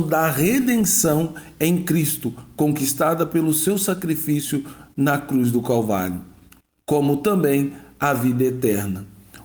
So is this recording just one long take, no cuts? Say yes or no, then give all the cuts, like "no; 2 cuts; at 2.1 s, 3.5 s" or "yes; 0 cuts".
yes; 0 cuts